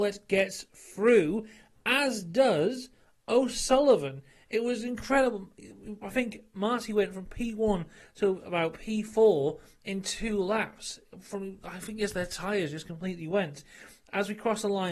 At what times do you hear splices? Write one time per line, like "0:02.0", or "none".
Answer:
none